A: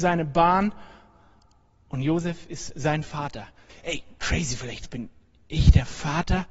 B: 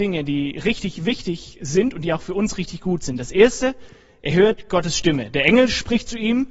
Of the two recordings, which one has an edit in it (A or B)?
A